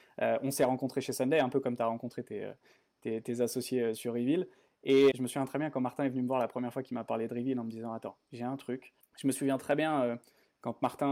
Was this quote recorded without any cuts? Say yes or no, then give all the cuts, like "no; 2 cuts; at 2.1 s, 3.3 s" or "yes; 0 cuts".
no; 2 cuts; at 5.1 s, 9.0 s